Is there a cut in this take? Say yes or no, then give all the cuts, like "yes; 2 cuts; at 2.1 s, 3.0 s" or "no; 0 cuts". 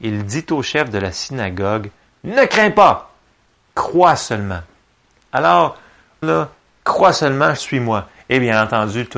yes; 2 cuts; at 6.2 s, 7.6 s